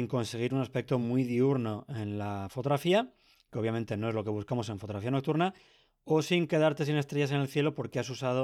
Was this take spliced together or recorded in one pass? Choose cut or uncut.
uncut